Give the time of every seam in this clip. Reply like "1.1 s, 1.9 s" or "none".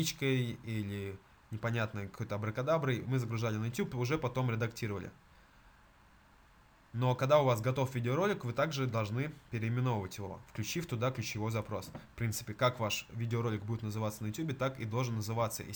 none